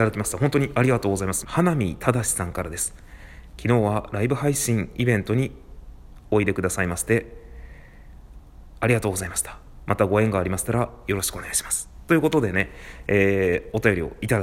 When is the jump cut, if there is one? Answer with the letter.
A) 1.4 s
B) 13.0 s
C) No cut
A